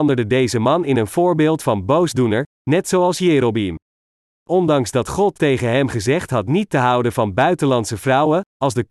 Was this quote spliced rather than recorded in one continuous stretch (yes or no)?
no